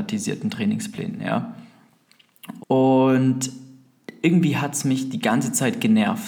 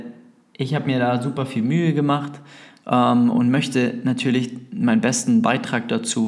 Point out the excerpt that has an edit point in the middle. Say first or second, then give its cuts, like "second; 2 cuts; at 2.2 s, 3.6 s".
first; 1 cut; at 2.6 s